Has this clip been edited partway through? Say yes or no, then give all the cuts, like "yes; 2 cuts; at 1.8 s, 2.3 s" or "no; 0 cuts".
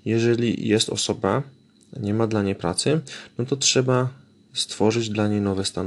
no; 0 cuts